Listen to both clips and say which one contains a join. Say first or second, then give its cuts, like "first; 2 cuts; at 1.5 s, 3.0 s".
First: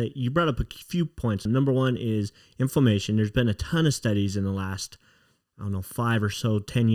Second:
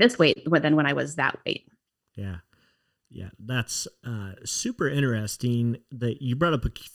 first; 1 cut; at 1.5 s